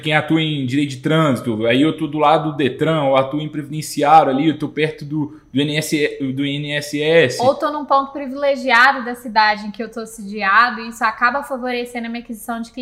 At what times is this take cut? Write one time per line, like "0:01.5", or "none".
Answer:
none